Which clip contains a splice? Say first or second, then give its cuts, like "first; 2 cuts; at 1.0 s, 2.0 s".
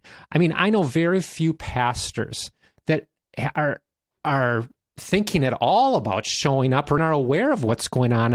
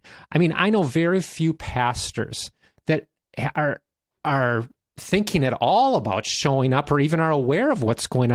first; 1 cut; at 7.0 s